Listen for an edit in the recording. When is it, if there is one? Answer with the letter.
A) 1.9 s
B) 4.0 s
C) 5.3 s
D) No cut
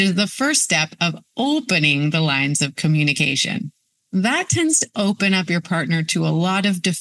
B